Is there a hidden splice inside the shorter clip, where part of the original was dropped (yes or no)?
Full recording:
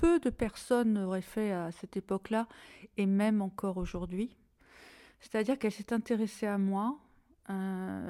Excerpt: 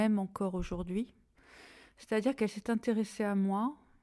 no